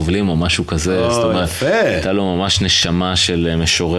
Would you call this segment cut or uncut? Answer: uncut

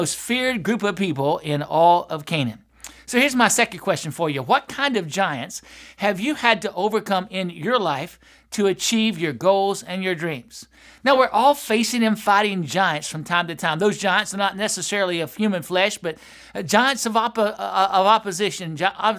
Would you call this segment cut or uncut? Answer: uncut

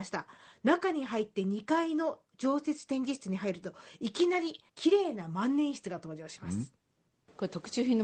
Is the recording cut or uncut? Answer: cut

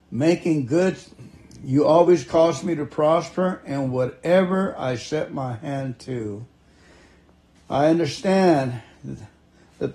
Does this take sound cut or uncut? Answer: cut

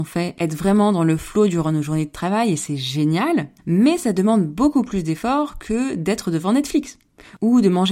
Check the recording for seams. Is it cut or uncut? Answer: cut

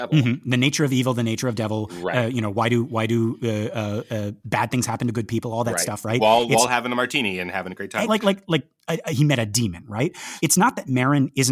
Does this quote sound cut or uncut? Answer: cut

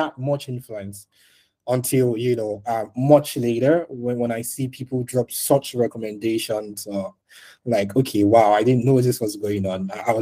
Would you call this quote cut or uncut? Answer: uncut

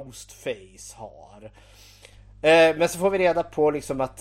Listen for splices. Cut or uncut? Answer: uncut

